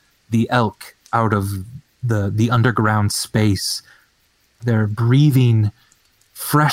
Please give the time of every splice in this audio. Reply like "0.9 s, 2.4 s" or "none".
4.6 s